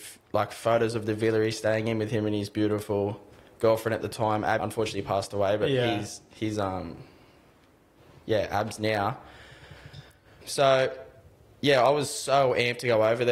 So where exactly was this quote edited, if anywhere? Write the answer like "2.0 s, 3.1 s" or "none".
4.6 s, 10.4 s